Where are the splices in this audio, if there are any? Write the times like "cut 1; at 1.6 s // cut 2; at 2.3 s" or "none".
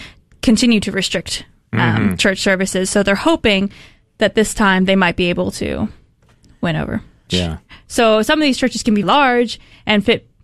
cut 1; at 7.3 s // cut 2; at 9.0 s

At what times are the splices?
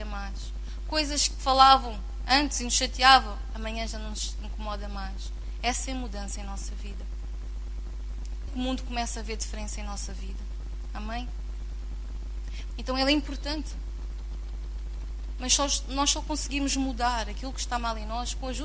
cut 1; at 8.5 s // cut 2; at 12.7 s

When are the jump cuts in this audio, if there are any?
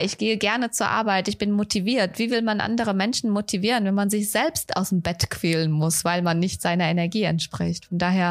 none

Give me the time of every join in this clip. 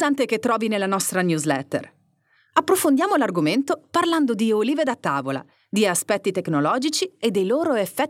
none

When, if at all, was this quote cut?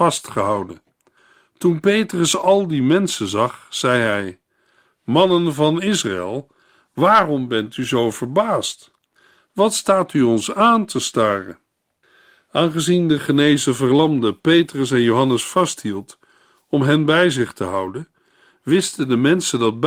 none

